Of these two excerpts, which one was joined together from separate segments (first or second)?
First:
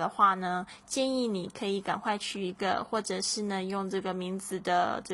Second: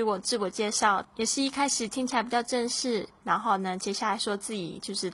second